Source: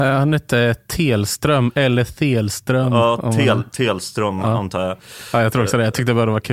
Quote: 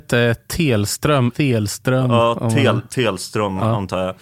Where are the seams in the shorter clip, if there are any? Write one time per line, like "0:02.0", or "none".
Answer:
0:01.3